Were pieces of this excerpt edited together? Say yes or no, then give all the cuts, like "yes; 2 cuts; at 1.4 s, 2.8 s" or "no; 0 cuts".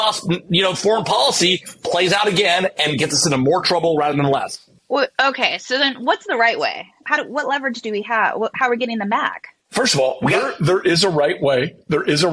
yes; 1 cut; at 7.0 s